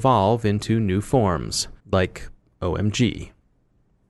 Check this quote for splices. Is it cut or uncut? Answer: cut